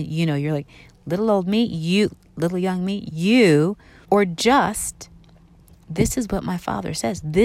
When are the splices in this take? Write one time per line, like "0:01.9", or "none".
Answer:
0:04.0